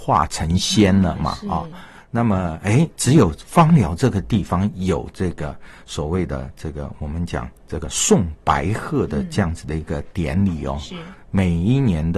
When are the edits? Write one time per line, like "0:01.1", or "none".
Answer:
0:11.2